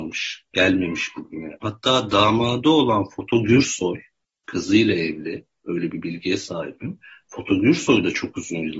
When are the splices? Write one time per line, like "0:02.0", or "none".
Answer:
0:01.6